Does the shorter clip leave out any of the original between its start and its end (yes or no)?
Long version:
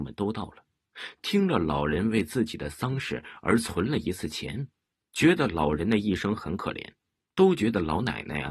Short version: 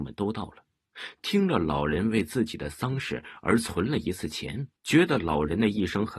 yes